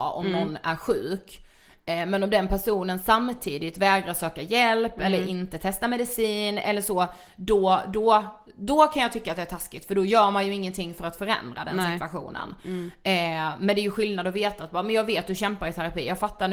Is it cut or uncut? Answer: uncut